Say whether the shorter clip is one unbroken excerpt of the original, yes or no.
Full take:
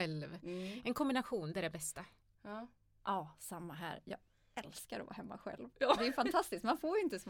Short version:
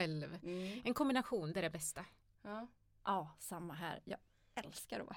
yes